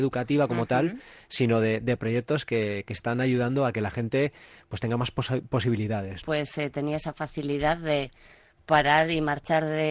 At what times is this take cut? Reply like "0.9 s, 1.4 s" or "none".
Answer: 6.2 s